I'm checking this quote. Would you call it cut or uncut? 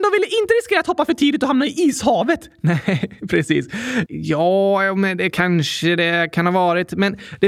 cut